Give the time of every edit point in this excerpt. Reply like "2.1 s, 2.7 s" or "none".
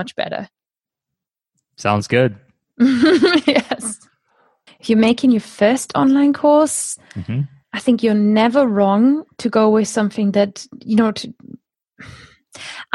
4.7 s